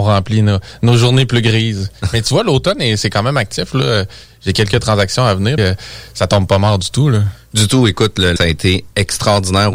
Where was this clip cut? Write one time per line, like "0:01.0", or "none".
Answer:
0:05.6
0:08.4